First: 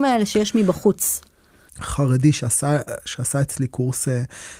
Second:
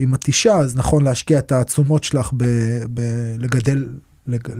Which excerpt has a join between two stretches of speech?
first; 1 cut; at 1.7 s

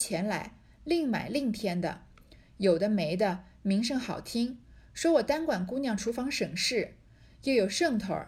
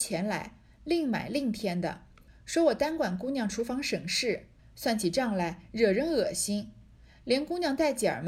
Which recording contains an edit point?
second; 2 cuts; at 2.3 s, 4.6 s

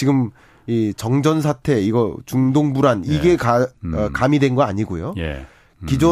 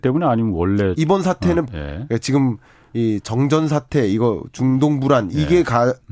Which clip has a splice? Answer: second; 1 cut; at 1.7 s

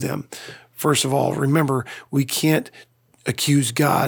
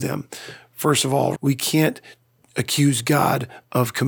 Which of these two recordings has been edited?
second; 1 cut; at 1.4 s

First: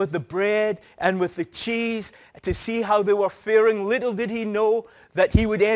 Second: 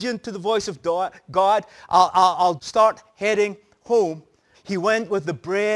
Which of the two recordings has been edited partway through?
second; 2 cuts; at 2.6 s, 4.5 s

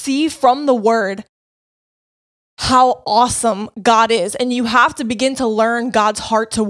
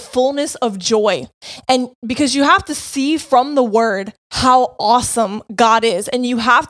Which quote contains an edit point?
second; 2 cuts; at 1.6 s, 4.2 s

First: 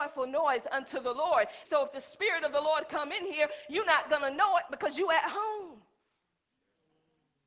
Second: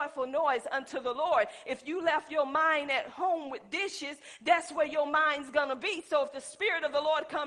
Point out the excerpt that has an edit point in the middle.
first; 1 cut; at 1.6 s

